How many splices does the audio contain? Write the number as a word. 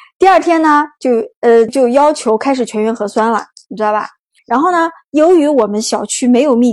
two